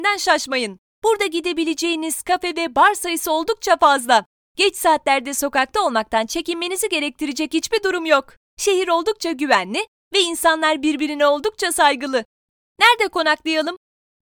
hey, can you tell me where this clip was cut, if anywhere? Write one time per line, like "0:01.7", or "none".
none